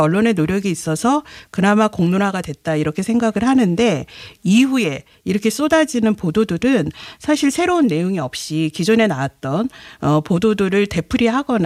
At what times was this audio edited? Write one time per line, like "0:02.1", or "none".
none